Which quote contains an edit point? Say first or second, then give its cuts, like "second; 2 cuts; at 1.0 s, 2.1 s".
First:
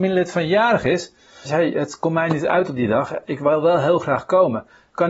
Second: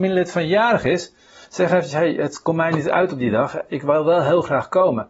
first; 1 cut; at 1.5 s